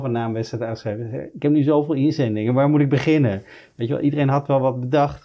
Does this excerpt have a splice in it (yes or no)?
no